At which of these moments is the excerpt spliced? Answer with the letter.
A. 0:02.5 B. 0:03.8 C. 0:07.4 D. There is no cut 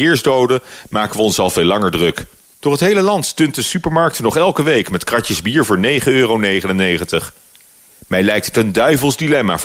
A